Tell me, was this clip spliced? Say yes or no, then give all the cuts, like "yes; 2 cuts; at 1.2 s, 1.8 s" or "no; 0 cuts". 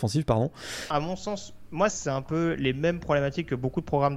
yes; 2 cuts; at 0.9 s, 1.9 s